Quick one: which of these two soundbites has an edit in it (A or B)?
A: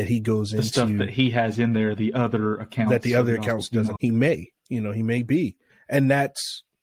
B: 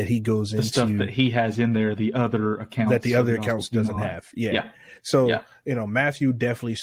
A